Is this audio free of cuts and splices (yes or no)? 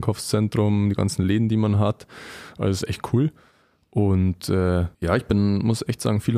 no